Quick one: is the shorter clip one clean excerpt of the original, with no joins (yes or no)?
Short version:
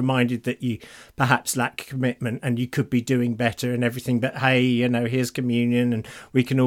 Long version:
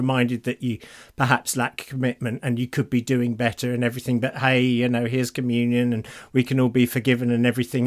yes